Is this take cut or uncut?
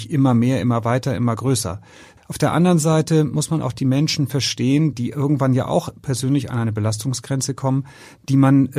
cut